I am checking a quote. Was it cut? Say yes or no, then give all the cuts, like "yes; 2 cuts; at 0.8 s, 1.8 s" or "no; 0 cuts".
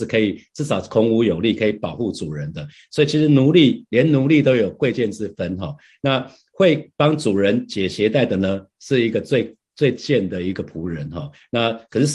no; 0 cuts